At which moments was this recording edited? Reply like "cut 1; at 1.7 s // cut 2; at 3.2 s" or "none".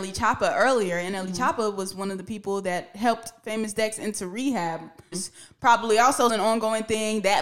cut 1; at 5.1 s // cut 2; at 6.3 s